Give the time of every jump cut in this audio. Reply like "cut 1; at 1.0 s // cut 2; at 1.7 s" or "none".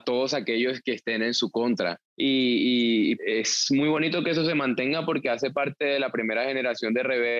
cut 1; at 2.1 s // cut 2; at 3.2 s